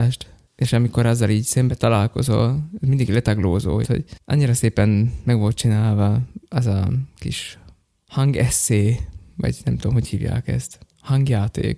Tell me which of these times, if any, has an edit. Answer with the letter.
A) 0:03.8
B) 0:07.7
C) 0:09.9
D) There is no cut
A